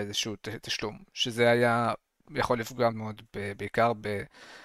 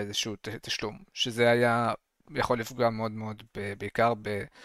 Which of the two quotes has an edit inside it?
first; 1 cut; at 2.9 s

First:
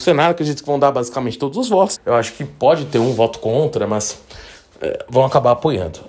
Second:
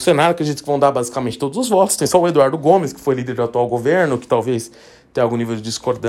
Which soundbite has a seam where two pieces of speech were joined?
first; 1 cut; at 2.0 s

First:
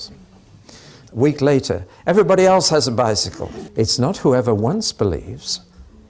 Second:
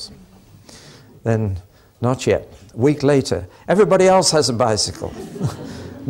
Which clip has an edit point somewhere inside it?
first; 2 cuts; at 1.0 s, 3.7 s

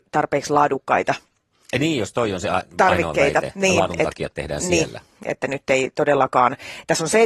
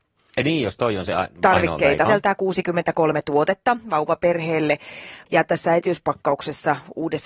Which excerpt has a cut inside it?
second; 2 cuts; at 2.1 s, 5.3 s

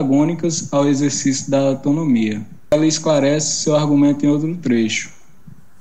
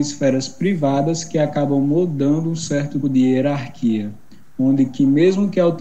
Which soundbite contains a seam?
second; 1 cut; at 3.0 s

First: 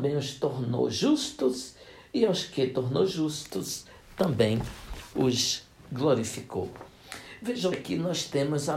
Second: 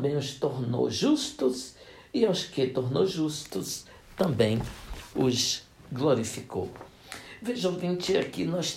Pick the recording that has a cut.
first; 1 cut; at 7.7 s

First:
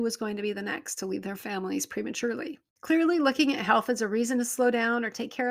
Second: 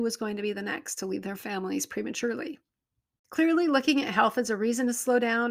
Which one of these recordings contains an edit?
first; 1 cut; at 2.7 s

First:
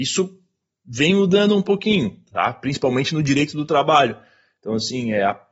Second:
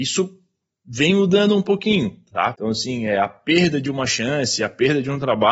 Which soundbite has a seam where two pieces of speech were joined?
second; 1 cut; at 2.5 s

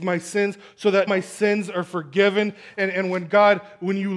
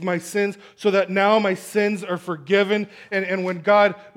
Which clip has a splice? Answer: first; 1 cut; at 1.1 s

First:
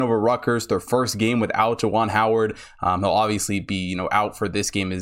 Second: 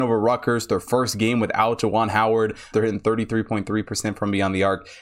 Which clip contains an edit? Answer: second; 1 cut; at 2.7 s

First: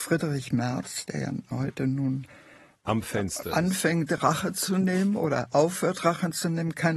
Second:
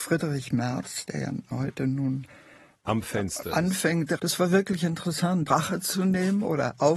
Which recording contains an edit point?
second; 2 cuts; at 4.2 s, 5.5 s

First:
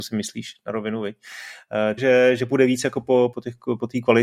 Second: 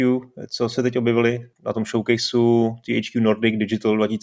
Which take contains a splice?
first; 2 cuts; at 2.0 s, 3.3 s

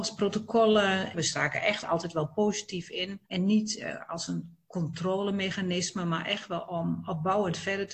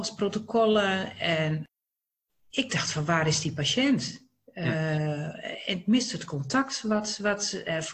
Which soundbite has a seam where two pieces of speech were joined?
first; 2 cuts; at 1.1 s, 3.2 s

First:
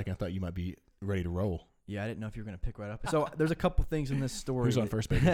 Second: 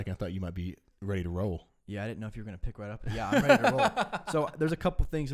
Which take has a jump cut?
first; 1 cut; at 3.0 s

